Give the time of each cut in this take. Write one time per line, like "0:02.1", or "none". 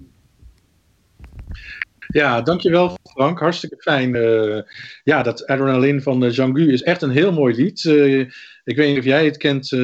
none